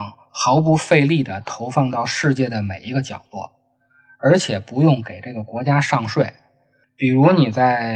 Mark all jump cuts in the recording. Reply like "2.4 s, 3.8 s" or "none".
6.8 s